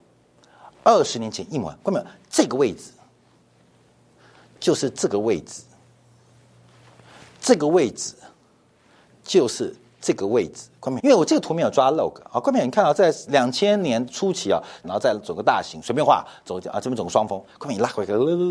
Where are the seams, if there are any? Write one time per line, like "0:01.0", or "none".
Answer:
0:11.0
0:14.8